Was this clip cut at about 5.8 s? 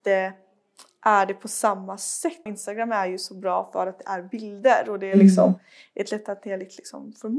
no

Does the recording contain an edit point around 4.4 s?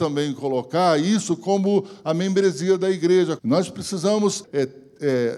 yes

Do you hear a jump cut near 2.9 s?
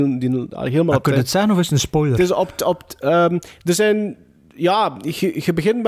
no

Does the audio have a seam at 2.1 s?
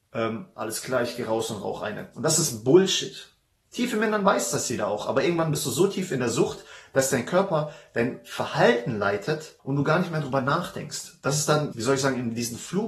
yes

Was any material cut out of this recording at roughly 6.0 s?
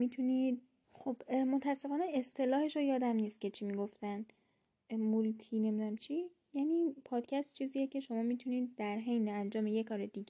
yes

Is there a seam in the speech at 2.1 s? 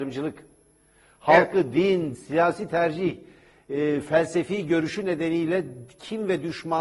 yes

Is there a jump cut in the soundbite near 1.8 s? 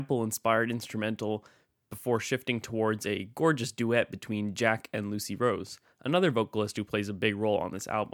no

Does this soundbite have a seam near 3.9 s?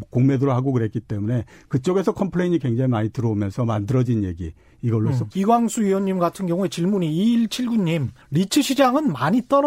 no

